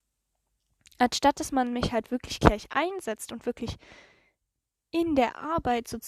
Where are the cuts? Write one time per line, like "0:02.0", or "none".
none

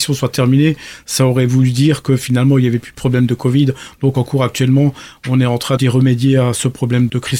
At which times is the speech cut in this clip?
none

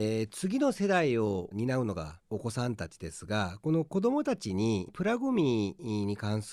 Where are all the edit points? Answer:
0:02.2

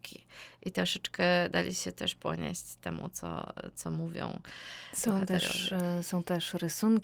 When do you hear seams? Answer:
none

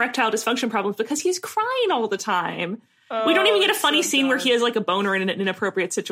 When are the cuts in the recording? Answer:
none

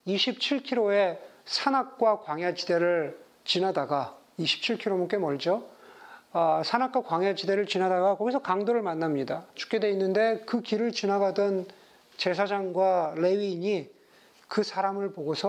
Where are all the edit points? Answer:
0:09.5

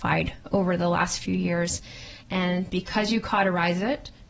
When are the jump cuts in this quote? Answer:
0:02.2

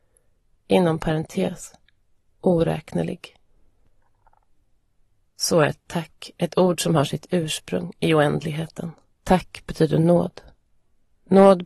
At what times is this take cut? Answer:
0:09.1

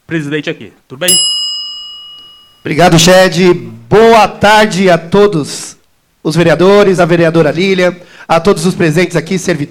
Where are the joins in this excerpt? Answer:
none

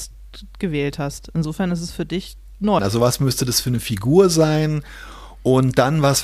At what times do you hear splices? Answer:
0:02.8

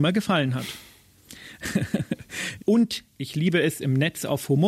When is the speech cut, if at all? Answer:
0:02.6

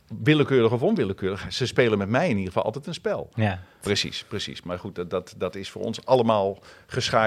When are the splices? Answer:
0:03.8

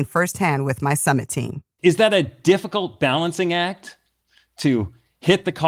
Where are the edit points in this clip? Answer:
0:01.8

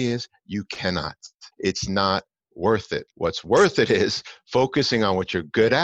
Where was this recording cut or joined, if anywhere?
0:01.5
0:03.1

